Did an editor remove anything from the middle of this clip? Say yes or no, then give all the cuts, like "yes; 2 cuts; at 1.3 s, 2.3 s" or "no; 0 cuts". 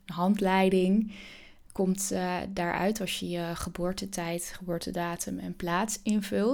no; 0 cuts